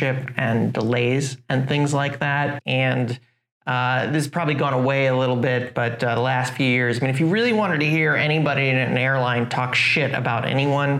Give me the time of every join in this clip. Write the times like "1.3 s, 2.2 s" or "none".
2.6 s